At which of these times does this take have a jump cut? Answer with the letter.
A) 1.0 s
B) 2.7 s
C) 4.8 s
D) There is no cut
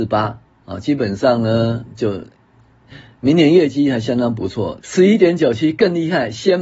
C